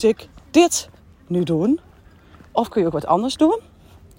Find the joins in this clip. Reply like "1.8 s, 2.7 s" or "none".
none